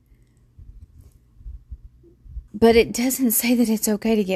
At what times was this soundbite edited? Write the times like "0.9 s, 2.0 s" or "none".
2.5 s